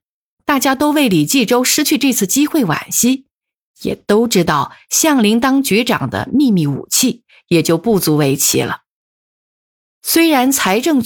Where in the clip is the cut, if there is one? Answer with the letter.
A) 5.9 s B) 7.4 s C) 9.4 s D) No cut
D